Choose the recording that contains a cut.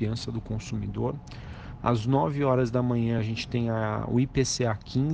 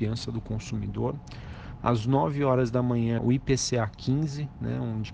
second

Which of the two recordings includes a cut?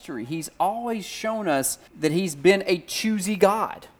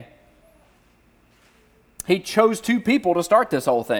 first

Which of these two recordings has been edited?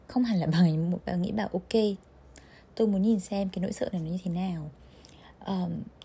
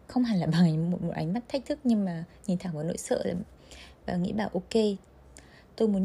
first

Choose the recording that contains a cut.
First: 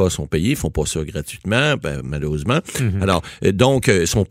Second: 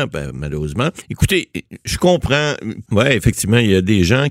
second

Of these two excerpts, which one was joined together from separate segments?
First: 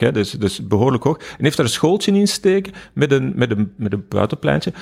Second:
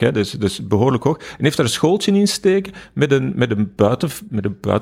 first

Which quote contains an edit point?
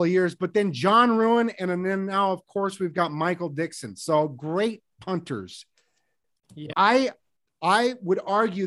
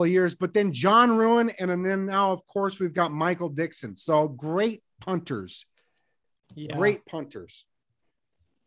first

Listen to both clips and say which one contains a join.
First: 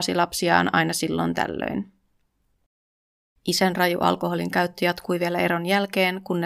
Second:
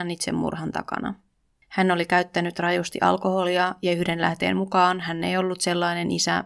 second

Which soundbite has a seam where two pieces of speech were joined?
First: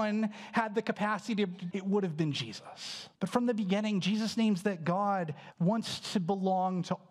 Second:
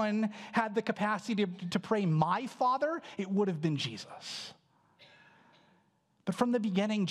first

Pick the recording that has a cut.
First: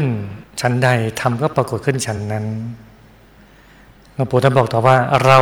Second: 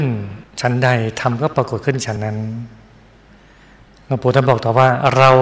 second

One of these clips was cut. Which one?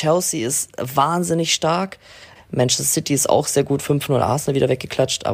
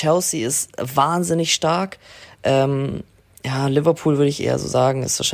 first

